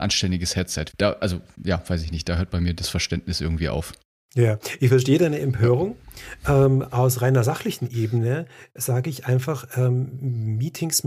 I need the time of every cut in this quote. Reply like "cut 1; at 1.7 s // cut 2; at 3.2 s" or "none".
cut 1; at 0.9 s